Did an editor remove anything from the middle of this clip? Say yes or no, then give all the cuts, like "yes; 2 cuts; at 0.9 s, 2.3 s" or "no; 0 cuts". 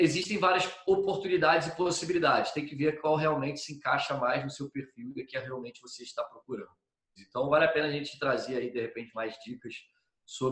yes; 2 cuts; at 7.2 s, 9.1 s